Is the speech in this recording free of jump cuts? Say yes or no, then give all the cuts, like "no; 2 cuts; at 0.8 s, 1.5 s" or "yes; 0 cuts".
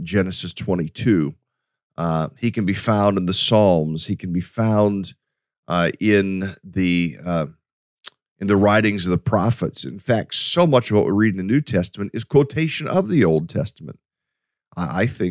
yes; 0 cuts